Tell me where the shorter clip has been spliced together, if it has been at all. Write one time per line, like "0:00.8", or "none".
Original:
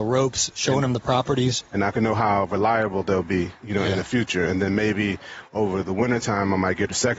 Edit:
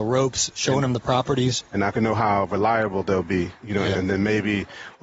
0:03.9